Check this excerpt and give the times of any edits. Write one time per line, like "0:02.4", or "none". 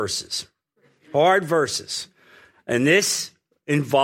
none